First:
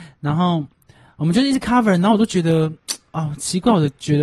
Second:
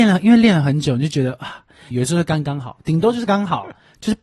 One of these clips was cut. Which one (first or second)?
second